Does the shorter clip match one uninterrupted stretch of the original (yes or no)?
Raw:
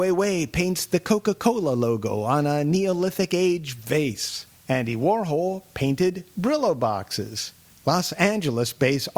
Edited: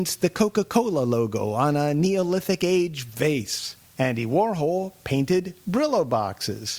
yes